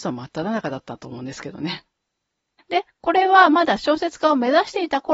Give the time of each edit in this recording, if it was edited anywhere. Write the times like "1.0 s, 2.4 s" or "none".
2.6 s